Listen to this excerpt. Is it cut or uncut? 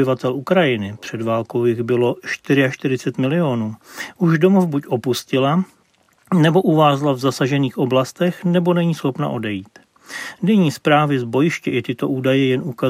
uncut